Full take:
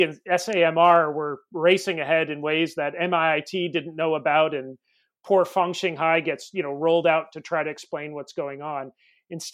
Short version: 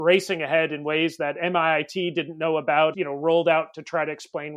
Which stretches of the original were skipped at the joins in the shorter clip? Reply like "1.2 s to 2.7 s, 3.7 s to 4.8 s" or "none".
4.5 s to 6.5 s